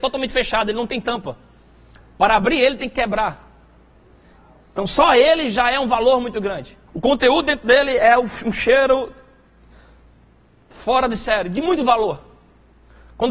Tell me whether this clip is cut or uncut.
cut